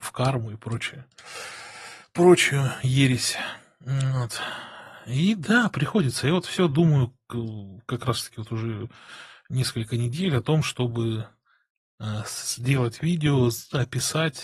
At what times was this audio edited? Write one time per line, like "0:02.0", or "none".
none